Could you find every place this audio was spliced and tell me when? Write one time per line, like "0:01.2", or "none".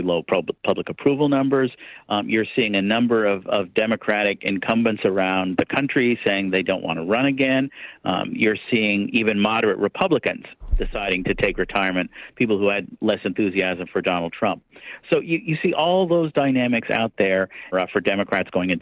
0:17.7